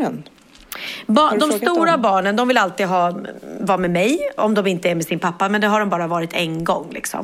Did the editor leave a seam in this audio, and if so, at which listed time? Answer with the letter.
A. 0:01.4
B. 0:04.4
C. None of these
B